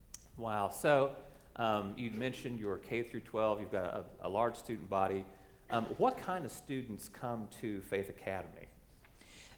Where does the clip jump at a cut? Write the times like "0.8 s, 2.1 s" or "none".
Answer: none